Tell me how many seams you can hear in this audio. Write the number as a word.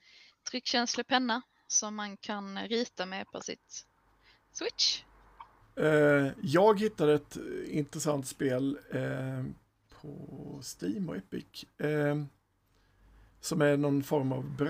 one